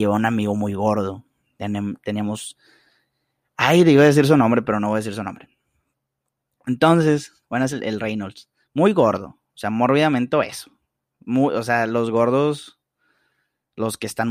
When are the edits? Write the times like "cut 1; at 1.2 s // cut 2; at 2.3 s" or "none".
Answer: cut 1; at 7.7 s